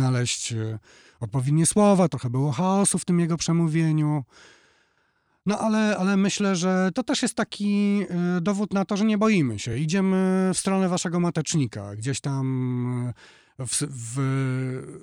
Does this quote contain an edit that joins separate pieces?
no; 0 cuts

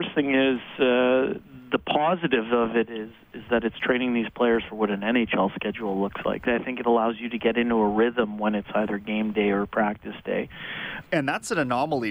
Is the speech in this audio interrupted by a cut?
yes; 2 cuts; at 6.5 s, 11.0 s

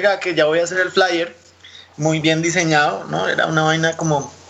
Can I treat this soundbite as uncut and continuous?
no; 1 cut; at 2.2 s

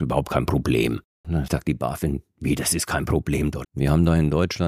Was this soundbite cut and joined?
yes; 2 cuts; at 1.2 s, 3.6 s

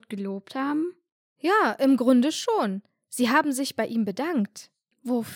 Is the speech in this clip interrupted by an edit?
no; 0 cuts

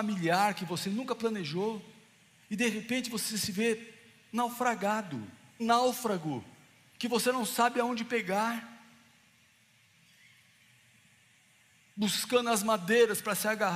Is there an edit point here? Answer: yes; 1 cut; at 5.6 s

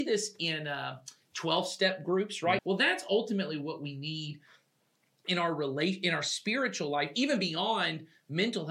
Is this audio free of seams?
no; 1 cut; at 2.6 s

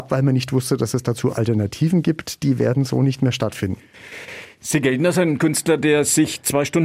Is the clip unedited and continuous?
yes; 0 cuts

